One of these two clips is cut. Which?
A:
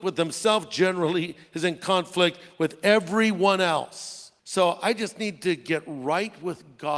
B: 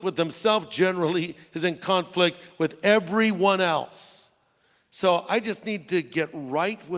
A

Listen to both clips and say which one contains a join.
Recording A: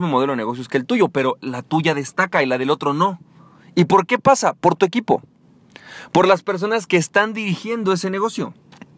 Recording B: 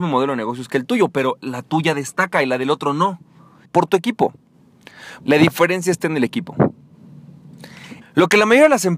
B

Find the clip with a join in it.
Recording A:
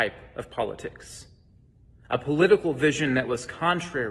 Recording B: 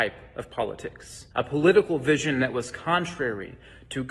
B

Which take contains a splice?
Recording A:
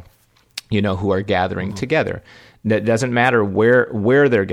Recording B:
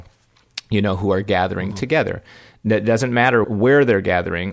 B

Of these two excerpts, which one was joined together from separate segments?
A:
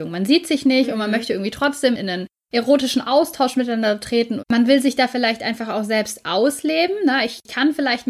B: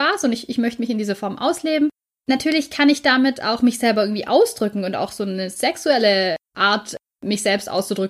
A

